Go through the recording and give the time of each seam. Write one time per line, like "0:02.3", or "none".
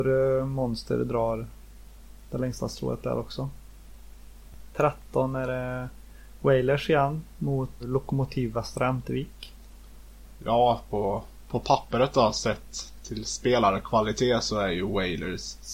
0:07.8

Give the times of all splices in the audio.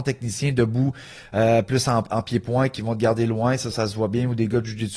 0:03.7

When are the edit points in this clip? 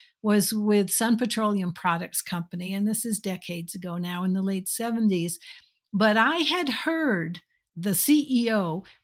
none

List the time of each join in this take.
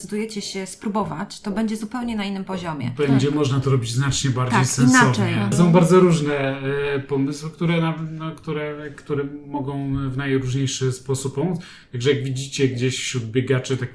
0:05.5

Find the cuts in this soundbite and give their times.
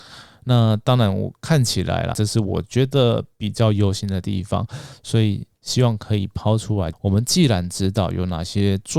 0:02.1
0:06.9

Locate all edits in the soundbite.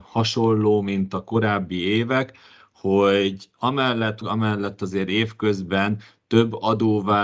0:04.2

